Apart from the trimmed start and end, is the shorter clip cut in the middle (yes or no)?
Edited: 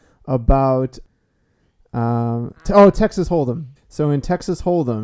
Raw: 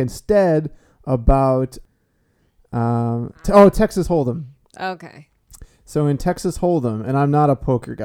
yes